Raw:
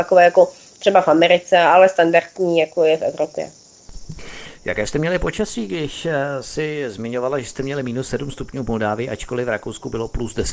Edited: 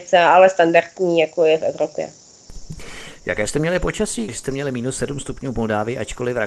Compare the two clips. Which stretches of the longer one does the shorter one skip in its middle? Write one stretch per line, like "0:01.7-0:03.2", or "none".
0:05.7-0:07.4

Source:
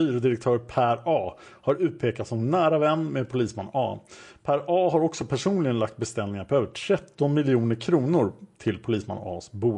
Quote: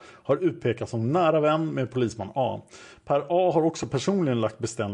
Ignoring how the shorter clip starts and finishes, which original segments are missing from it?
none

